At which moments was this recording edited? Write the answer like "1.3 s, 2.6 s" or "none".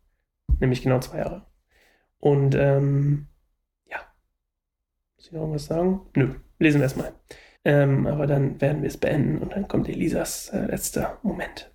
7.6 s